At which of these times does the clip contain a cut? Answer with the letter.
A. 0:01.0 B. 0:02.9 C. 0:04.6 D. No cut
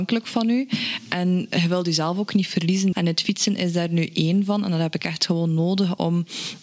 B